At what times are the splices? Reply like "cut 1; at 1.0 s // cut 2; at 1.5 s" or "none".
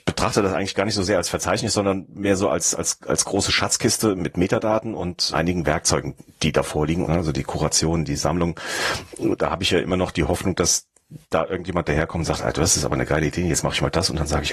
cut 1; at 5.3 s // cut 2; at 7.0 s